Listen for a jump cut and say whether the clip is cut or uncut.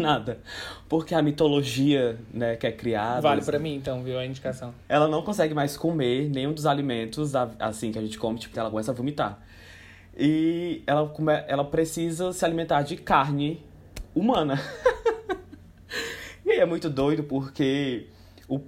cut